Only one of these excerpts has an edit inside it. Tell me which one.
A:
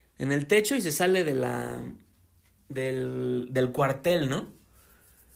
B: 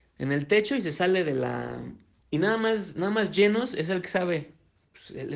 B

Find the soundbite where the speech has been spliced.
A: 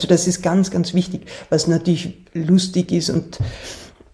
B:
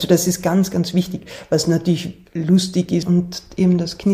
B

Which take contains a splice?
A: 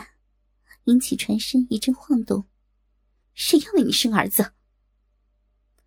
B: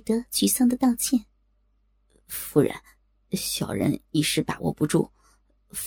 A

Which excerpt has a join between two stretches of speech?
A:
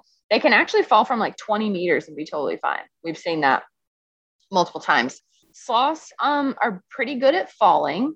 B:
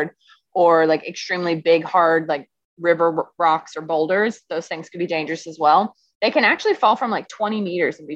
A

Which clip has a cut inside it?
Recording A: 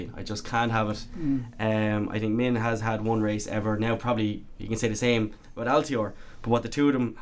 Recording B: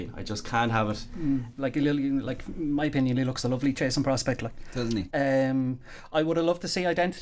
B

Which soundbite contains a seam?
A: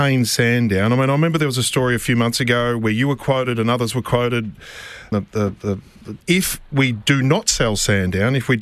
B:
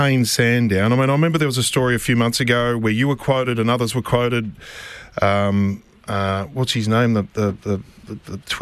A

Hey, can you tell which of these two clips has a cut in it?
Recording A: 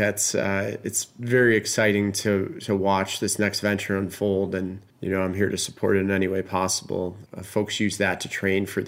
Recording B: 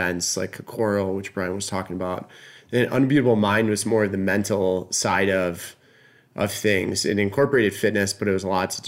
A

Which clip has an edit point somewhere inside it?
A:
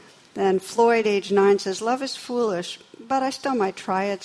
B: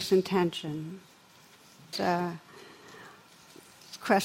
B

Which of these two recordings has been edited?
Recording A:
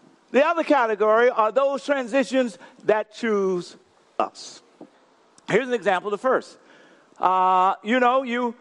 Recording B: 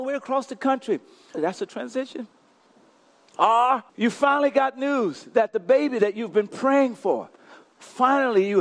B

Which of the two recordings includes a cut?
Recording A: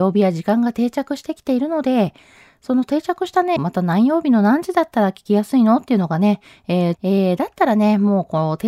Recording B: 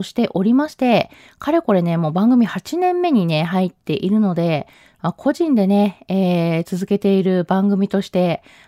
A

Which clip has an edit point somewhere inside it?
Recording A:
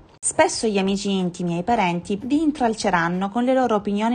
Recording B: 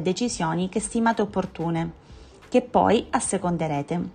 A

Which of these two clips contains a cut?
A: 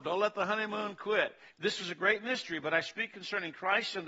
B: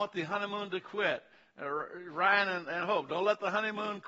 A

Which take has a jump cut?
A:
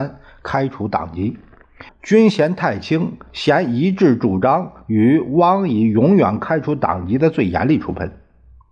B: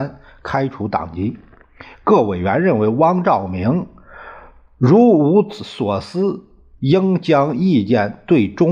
A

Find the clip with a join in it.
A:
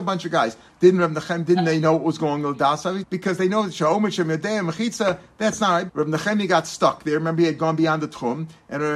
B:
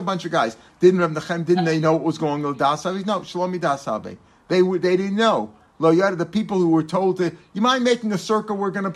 A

